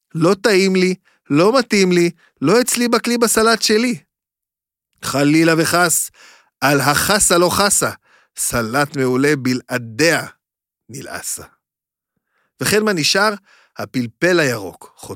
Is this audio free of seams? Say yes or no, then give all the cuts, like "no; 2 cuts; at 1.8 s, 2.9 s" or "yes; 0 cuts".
yes; 0 cuts